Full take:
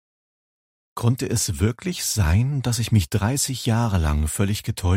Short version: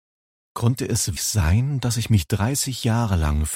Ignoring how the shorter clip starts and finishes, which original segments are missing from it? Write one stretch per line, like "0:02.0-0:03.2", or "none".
0:01.6-0:02.0